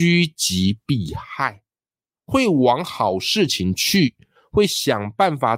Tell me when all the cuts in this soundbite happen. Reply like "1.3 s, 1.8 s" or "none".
none